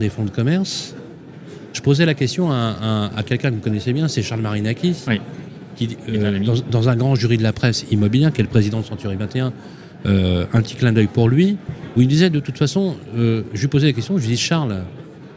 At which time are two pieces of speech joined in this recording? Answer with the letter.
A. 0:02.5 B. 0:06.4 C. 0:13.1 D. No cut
D